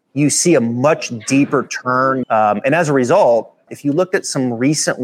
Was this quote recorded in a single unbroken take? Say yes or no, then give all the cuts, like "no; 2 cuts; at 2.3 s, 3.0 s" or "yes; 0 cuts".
no; 2 cuts; at 2.2 s, 3.7 s